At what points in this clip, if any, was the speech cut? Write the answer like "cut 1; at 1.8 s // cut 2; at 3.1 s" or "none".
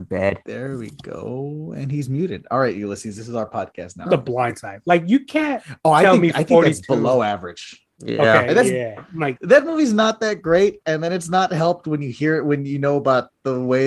cut 1; at 4.1 s // cut 2; at 9.4 s